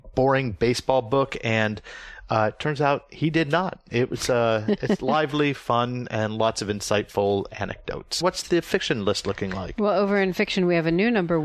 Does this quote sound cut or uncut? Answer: cut